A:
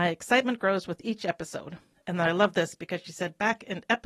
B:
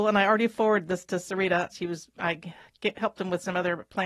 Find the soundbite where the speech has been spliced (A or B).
B